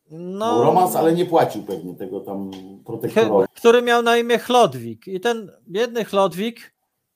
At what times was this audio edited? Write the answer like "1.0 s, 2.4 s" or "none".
3.5 s